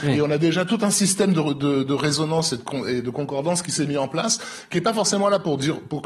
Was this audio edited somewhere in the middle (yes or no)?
no